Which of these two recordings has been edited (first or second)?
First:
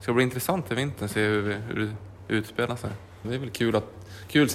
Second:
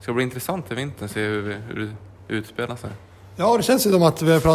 first